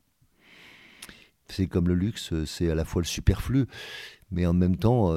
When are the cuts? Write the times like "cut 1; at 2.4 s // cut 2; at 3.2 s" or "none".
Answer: cut 1; at 1.3 s